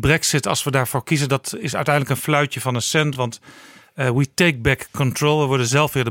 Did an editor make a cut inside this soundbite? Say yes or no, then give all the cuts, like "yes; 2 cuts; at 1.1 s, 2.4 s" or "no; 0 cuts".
no; 0 cuts